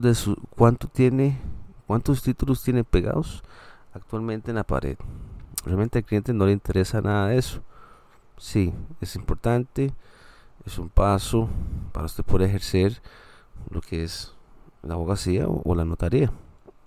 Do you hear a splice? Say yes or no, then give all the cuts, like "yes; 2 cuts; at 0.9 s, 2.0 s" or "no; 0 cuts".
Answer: no; 0 cuts